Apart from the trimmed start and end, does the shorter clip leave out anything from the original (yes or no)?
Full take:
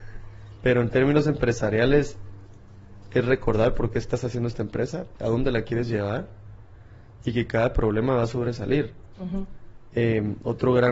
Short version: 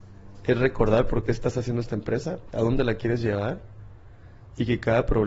no